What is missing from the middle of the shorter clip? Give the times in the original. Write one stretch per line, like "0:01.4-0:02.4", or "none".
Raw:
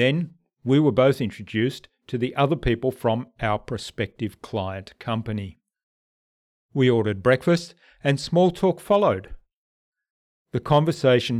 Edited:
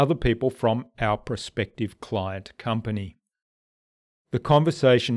0:06.5-0:10.3